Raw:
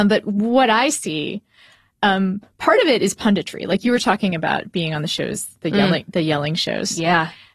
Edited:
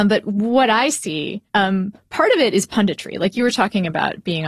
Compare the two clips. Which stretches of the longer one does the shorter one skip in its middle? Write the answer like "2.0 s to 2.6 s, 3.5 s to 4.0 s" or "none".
1.5 s to 1.9 s